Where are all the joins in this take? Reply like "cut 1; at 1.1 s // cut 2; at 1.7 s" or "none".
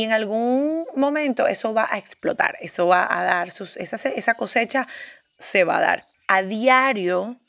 cut 1; at 6.1 s